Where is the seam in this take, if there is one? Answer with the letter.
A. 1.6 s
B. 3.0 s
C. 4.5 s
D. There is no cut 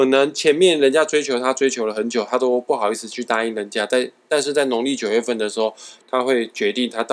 D